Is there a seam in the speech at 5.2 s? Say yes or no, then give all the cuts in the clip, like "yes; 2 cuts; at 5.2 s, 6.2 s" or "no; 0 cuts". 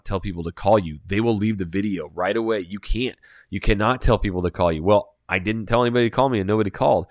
no; 0 cuts